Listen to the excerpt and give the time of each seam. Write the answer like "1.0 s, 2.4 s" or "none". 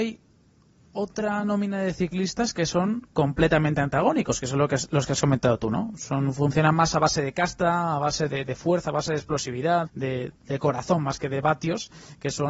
9.9 s